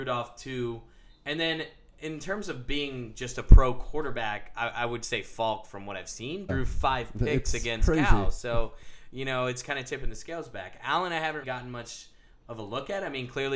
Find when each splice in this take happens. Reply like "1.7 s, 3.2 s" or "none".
6.5 s, 11.4 s